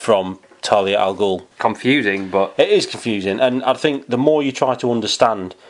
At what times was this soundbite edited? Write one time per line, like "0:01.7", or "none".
0:01.5